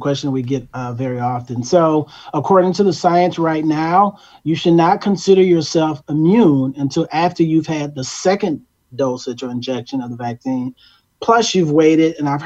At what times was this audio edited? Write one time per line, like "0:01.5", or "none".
none

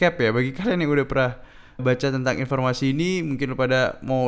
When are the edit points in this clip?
0:01.8

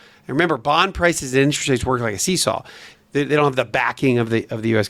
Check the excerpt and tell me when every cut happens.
0:02.9

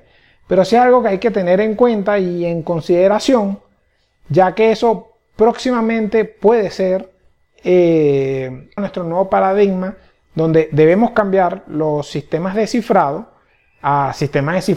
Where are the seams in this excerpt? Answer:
0:08.8

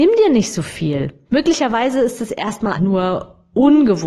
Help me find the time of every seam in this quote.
0:01.3
0:02.7

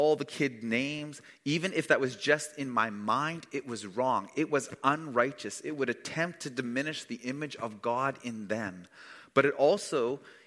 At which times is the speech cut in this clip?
none

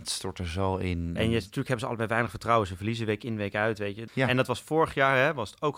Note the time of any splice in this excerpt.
0:04.1

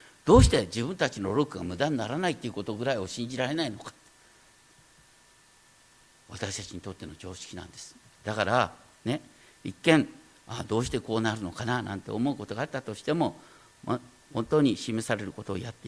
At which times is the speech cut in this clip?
none

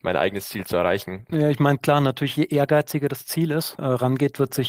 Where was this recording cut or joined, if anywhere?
0:01.3
0:03.8

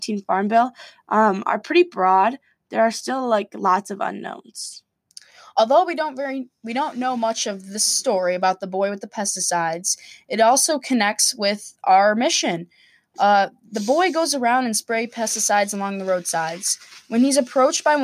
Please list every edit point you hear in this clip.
none

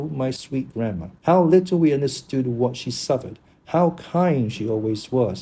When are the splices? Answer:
0:01.2

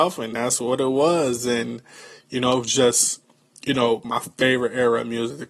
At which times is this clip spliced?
none

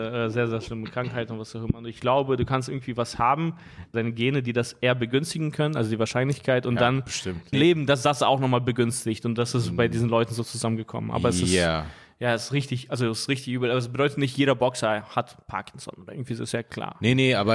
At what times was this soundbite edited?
0:03.9
0:07.5

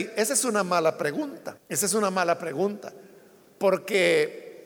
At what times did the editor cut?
0:01.6

